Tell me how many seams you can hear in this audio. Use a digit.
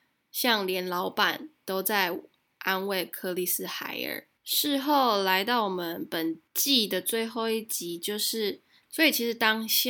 3